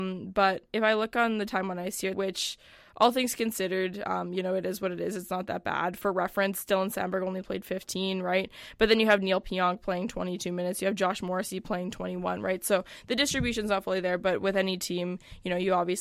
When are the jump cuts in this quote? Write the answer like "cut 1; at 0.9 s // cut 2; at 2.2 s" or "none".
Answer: cut 1; at 2.1 s